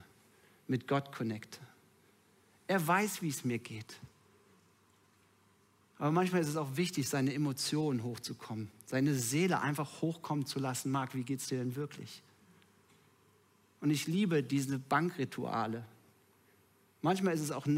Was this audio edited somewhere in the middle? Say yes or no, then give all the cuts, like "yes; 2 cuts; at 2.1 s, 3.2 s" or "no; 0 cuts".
no; 0 cuts